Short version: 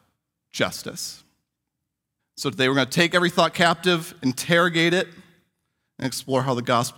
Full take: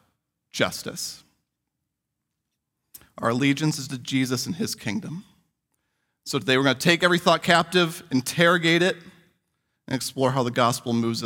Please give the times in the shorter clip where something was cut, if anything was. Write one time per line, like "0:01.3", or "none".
0:02.2